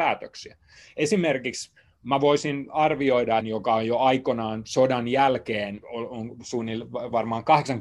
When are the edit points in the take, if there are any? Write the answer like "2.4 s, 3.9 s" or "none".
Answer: 3.4 s, 5.8 s